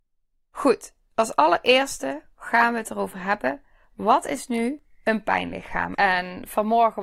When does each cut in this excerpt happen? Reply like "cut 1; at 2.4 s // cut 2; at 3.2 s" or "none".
cut 1; at 5.9 s